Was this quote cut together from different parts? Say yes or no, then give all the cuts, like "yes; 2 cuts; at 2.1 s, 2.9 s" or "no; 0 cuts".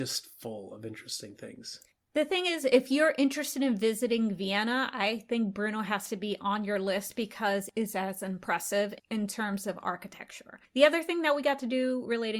no; 0 cuts